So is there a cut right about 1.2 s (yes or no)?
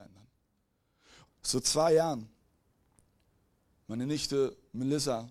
yes